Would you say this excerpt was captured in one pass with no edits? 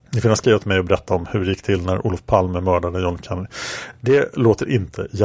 yes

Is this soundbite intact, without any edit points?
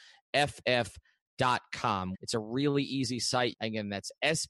no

